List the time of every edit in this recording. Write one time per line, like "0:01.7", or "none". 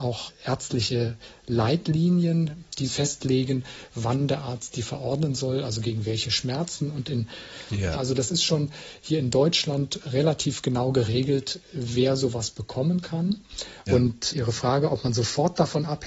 0:07.9
0:13.9